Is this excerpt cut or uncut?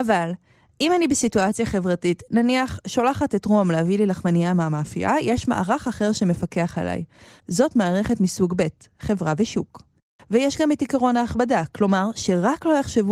cut